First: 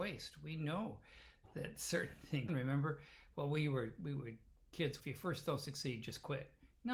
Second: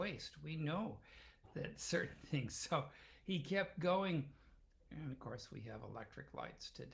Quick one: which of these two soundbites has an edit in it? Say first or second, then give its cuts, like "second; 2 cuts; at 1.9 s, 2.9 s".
first; 2 cuts; at 2.5 s, 5.0 s